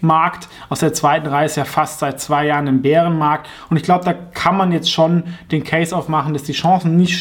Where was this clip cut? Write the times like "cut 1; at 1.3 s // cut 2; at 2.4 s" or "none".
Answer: none